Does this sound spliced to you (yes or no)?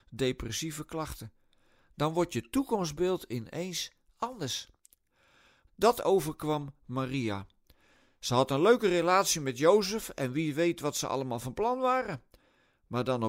yes